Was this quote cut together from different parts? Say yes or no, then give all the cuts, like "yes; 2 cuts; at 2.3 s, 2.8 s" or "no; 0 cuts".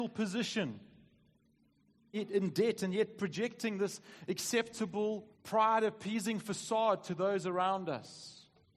yes; 2 cuts; at 2.1 s, 5.3 s